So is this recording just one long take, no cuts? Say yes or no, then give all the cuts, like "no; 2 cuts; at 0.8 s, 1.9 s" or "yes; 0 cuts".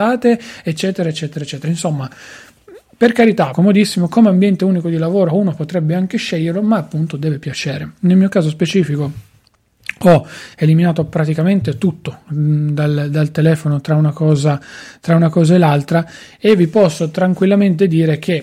no; 1 cut; at 3.5 s